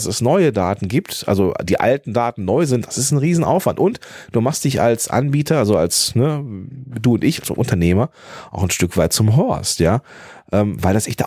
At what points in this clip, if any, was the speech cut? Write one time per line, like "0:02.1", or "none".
none